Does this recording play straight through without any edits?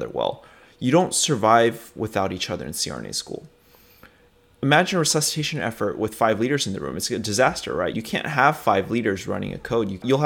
no; 1 cut; at 7.9 s

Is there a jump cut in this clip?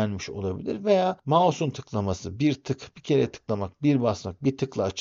no; 0 cuts

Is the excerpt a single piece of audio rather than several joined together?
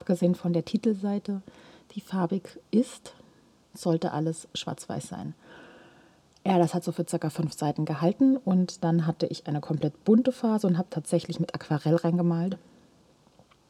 no; 1 cut; at 2.6 s

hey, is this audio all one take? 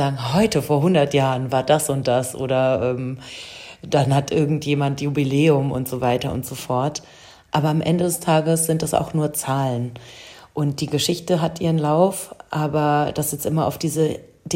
no; 1 cut; at 7.5 s

